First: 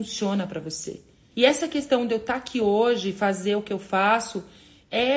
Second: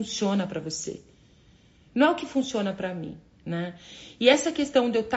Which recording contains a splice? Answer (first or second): first